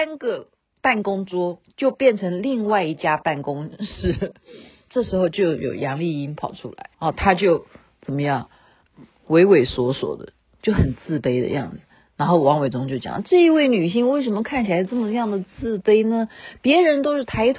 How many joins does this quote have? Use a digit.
1